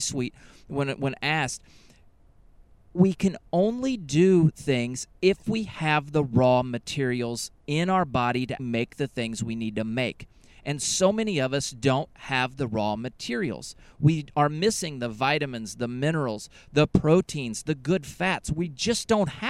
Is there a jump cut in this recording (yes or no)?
yes